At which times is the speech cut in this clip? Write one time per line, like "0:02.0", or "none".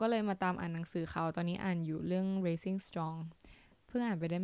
none